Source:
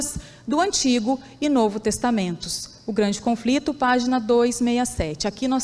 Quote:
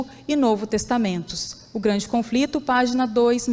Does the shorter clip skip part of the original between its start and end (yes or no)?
no